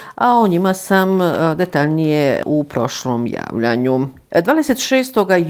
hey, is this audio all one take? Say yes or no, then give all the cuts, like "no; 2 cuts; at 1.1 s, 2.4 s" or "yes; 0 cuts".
yes; 0 cuts